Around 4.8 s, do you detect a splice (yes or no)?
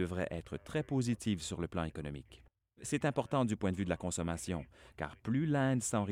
no